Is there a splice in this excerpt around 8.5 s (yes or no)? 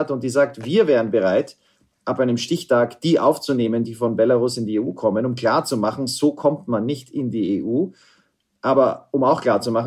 no